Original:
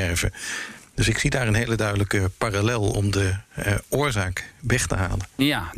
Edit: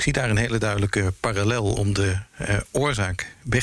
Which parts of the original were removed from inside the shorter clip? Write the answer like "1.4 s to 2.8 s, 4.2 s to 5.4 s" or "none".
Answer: none